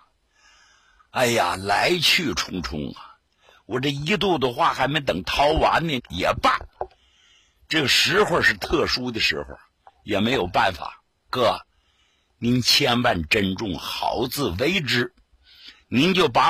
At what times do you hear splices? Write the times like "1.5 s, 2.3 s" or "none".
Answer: 6.0 s

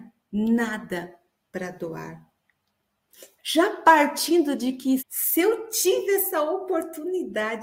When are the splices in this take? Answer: 3.4 s, 5.0 s

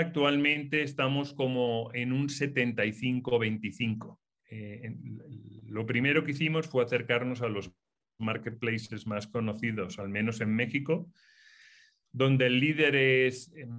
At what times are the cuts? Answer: 4.4 s

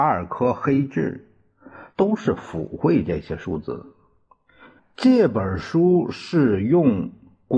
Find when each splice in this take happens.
1.9 s, 4.8 s

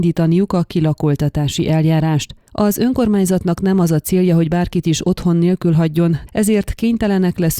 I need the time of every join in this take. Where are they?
6.3 s

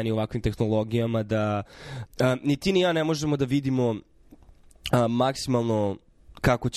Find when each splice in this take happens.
2.1 s

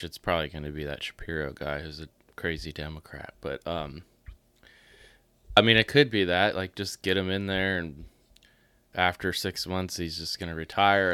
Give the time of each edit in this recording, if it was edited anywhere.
5.6 s, 8.9 s

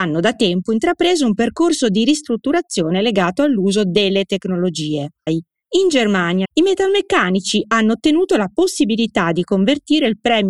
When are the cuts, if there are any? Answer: 5.3 s, 6.4 s

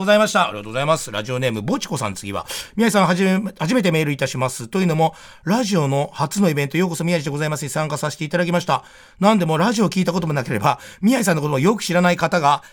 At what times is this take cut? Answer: none

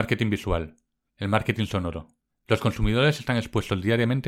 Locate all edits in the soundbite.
1.1 s, 2.3 s

